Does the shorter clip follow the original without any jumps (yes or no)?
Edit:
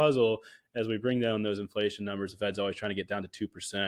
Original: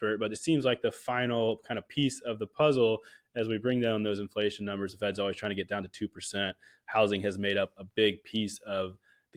yes